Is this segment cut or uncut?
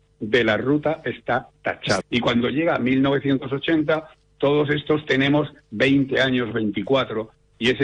cut